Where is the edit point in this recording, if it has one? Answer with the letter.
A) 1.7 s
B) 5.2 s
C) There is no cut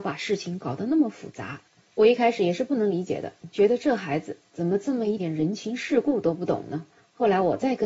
B